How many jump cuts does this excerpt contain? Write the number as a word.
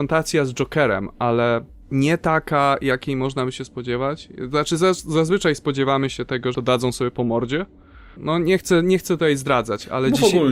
two